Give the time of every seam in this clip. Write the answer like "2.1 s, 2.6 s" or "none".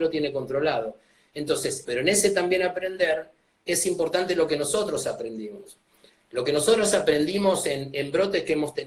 1.8 s